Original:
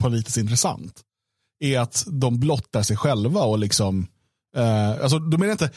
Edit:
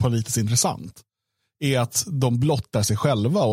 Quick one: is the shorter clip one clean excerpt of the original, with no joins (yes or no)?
yes